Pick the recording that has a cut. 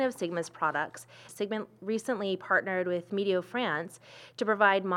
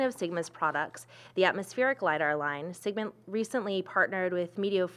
first; 1 cut; at 1.3 s

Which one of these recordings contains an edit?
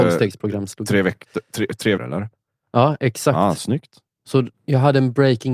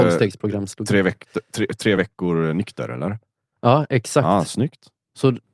first; 1 cut; at 2.0 s

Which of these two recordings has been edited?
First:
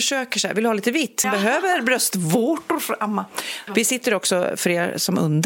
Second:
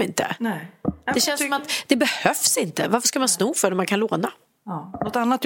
first; 2 cuts; at 1.2 s, 3.7 s

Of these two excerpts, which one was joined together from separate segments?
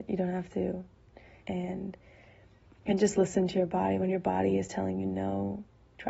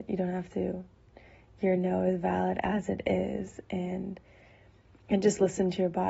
first; 1 cut; at 1.4 s

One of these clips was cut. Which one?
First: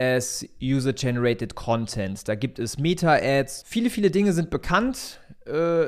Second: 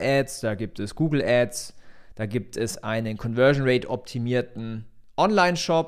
first; 1 cut; at 3.6 s

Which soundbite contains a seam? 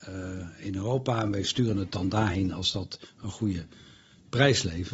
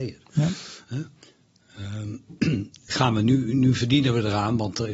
second; 1 cut; at 2.9 s

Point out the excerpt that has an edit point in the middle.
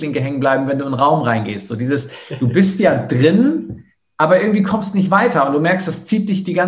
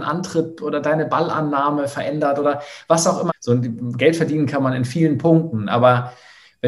second; 1 cut; at 3.3 s

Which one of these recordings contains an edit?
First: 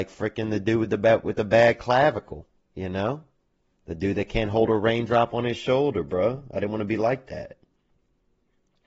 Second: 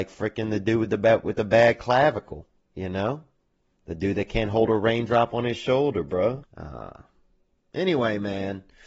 second; 1 cut; at 6.4 s

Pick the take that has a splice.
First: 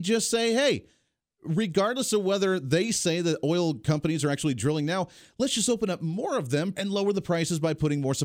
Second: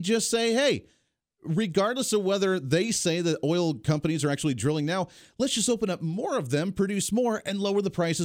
first; 1 cut; at 6.7 s

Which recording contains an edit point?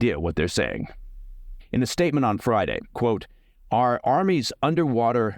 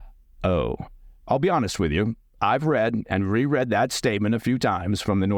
first; 2 cuts; at 1.6 s, 2.9 s

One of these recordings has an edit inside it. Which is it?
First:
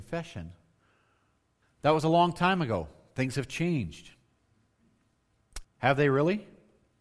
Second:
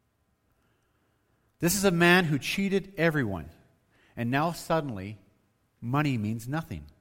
first; 2 cuts; at 1.6 s, 5.6 s

